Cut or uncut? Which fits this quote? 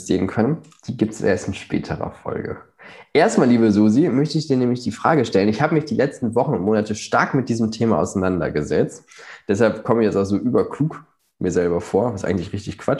uncut